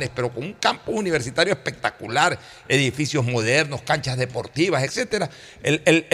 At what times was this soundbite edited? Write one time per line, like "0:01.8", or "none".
0:04.9